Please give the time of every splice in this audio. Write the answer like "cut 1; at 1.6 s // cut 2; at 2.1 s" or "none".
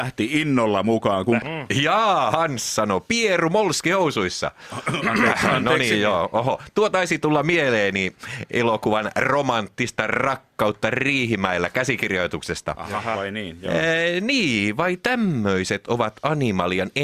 cut 1; at 1.4 s